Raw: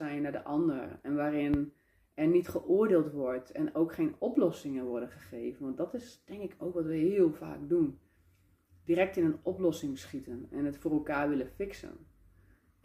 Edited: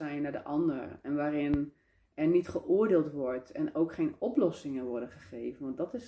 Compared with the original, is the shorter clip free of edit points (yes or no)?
yes